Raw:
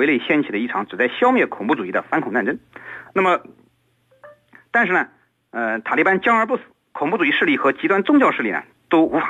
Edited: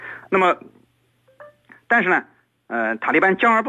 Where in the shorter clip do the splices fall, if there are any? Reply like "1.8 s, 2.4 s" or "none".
none